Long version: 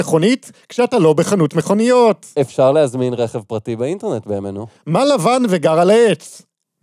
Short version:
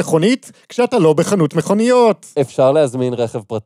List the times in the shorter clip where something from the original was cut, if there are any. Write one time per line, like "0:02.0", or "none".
none

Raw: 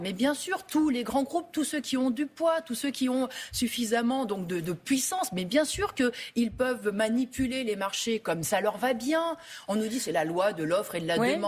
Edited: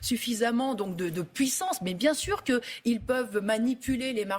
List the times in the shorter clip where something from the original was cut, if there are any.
none

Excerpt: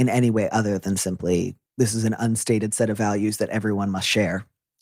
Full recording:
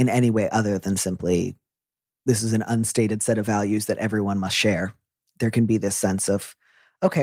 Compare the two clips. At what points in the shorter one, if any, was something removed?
0:01.7

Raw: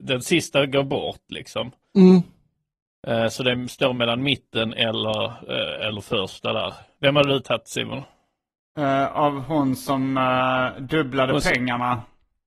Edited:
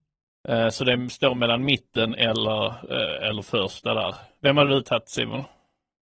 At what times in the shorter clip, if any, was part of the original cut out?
none

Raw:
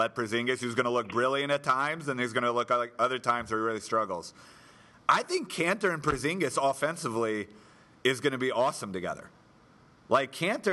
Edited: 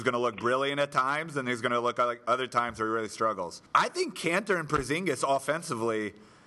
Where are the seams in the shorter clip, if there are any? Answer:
0:03.7

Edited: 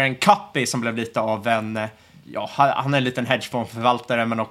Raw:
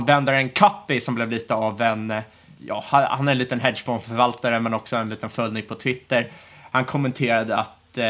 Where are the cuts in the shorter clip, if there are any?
none

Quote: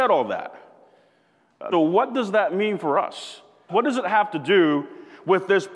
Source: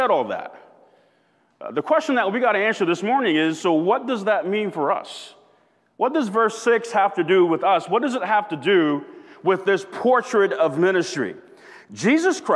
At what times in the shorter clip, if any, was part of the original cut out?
0:01.7
0:03.7

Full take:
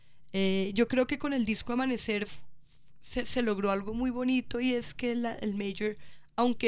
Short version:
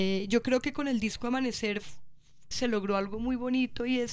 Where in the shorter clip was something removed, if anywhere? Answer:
0:02.5

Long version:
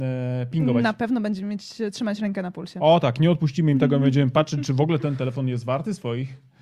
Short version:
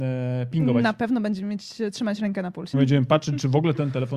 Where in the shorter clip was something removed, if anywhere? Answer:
0:02.7

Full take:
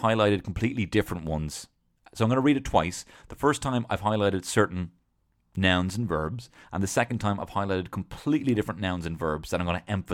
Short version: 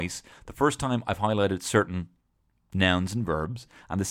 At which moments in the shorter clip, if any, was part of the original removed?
none

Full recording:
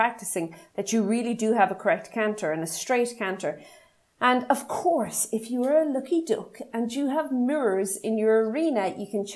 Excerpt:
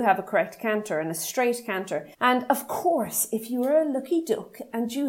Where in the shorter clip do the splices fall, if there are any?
0:02.1

